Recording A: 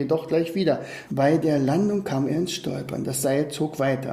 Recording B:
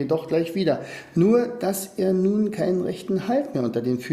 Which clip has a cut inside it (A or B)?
A